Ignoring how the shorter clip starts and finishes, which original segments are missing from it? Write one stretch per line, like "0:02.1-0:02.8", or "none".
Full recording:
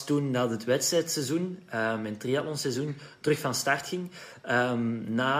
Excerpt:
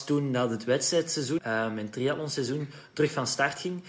0:01.4-0:01.7